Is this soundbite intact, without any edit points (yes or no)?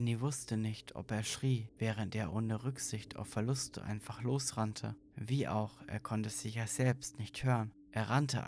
yes